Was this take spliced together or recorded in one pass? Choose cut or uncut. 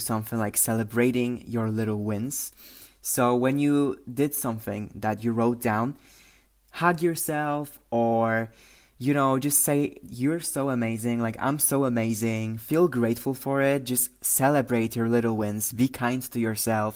uncut